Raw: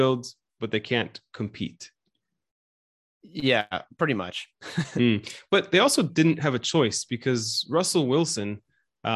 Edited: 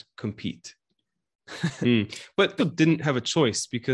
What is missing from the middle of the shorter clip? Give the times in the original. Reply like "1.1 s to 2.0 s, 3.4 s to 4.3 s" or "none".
2.5 s to 4.5 s, 5.7 s to 6.0 s